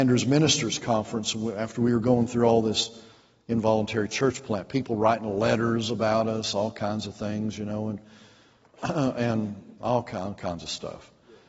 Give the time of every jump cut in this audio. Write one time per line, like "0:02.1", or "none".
none